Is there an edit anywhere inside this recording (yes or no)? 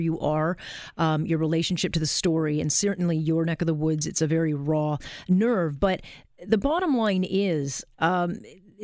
no